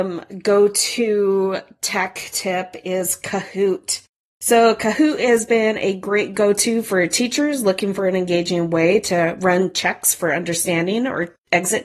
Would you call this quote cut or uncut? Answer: uncut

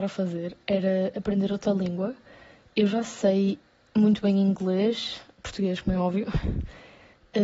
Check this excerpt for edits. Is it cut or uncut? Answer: uncut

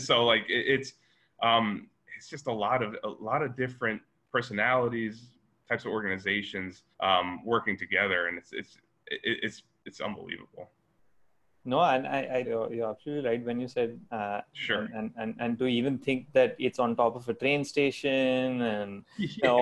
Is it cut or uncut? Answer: cut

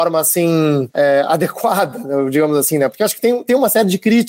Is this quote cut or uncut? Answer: uncut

